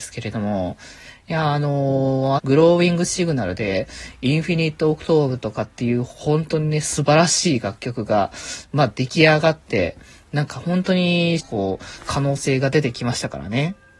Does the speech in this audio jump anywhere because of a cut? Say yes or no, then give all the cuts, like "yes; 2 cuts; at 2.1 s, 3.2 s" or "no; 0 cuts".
yes; 2 cuts; at 2.4 s, 11.4 s